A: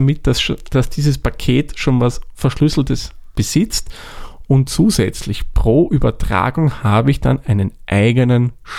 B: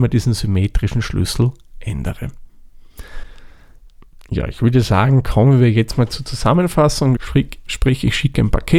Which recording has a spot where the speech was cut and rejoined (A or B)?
B